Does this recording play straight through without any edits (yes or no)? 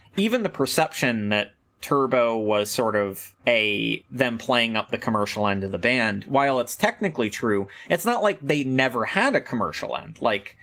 no